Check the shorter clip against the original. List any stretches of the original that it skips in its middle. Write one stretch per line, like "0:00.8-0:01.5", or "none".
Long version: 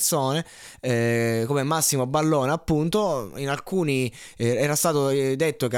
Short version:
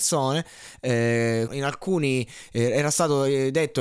0:01.5-0:03.3